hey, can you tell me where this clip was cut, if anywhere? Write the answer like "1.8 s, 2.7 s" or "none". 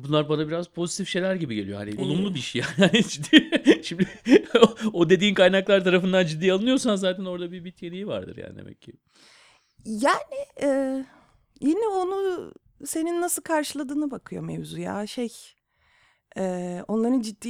2.0 s